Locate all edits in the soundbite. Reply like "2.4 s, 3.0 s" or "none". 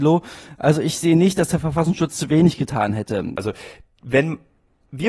3.4 s